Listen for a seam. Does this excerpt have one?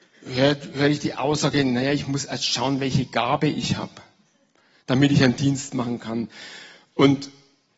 no; 0 cuts

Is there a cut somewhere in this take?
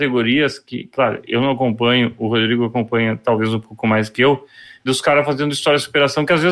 yes; 1 cut; at 4.9 s

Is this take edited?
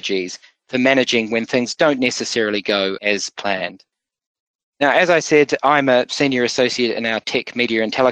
no; 0 cuts

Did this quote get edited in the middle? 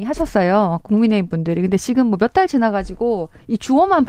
no; 0 cuts

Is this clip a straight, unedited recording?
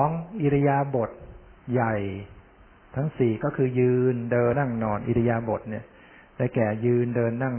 no; 1 cut; at 4.5 s

